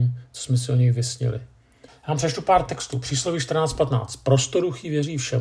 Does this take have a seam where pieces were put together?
yes; 1 cut; at 1.9 s

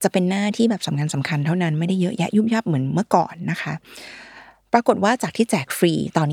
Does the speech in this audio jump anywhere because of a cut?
no; 0 cuts

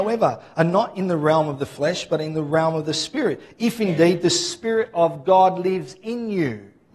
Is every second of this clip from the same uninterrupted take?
yes; 0 cuts

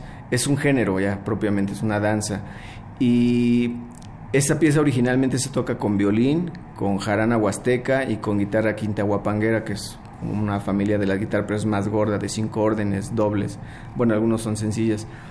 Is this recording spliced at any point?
no; 0 cuts

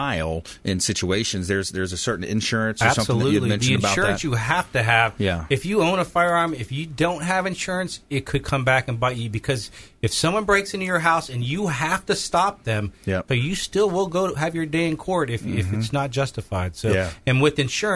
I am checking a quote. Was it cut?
yes; 1 cut; at 13.3 s

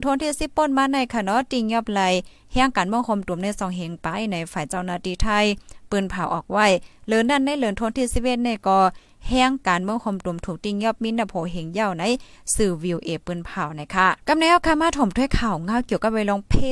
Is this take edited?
yes; 1 cut; at 14.2 s

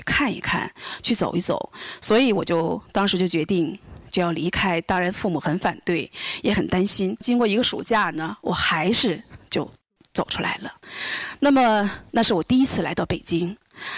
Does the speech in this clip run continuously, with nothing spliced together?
yes; 0 cuts

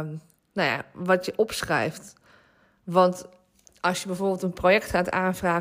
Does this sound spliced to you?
no; 0 cuts

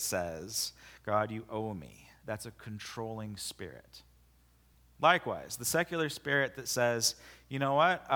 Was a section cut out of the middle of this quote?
no; 0 cuts

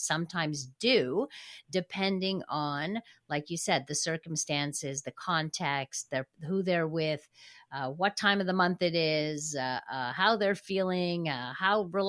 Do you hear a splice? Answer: no; 0 cuts

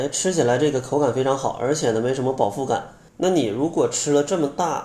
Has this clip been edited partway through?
yes; 1 cut; at 3.1 s

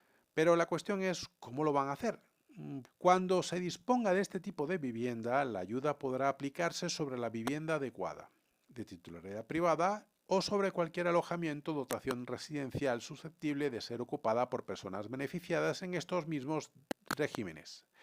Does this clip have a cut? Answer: yes; 1 cut; at 2.9 s

